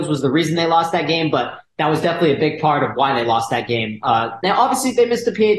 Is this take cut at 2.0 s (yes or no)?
no